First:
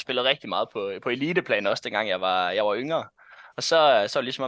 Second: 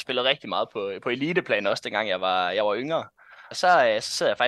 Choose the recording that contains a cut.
second; 1 cut; at 3.5 s

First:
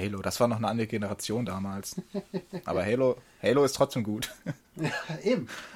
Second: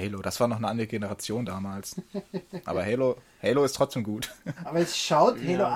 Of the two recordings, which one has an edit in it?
second; 1 cut; at 4.6 s

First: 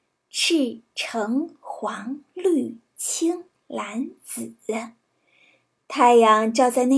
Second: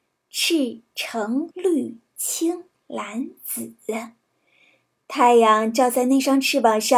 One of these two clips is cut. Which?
second; 1 cut; at 1.5 s

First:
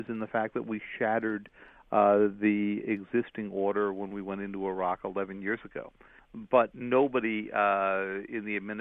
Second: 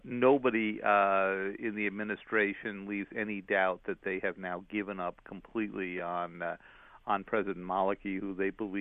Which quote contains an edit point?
first; 1 cut; at 6.2 s

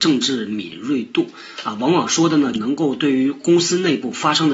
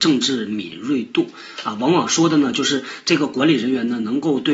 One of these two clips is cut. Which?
first; 1 cut; at 2.5 s

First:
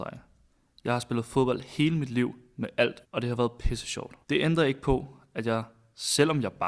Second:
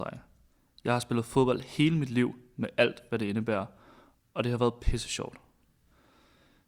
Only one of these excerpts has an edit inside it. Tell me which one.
first; 2 cuts; at 3.0 s, 4.2 s

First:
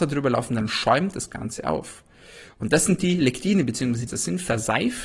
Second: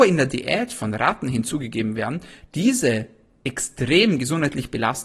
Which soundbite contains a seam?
first; 1 cut; at 4.1 s

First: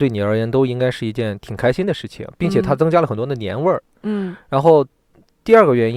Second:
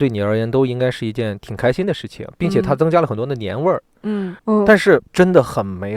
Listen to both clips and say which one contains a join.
second; 1 cut; at 4.4 s

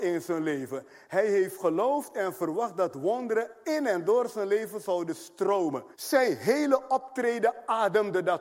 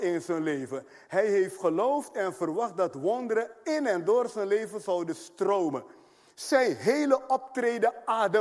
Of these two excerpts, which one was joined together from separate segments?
first; 1 cut; at 5.9 s

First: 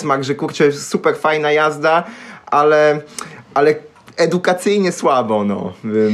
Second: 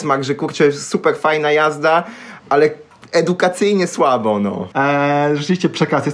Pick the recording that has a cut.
second; 2 cuts; at 2.4 s, 4.7 s

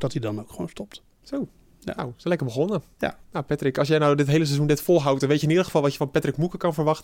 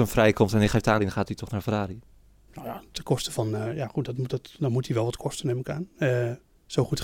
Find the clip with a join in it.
second; 1 cut; at 1.0 s

